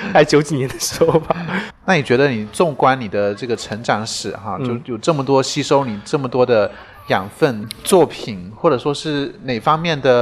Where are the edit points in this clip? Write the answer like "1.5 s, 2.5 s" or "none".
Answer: 1.7 s, 7.6 s